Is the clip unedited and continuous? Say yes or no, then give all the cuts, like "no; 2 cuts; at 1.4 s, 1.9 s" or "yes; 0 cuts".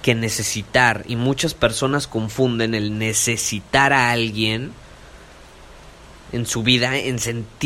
yes; 0 cuts